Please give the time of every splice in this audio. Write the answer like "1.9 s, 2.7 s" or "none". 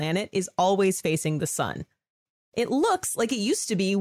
2.4 s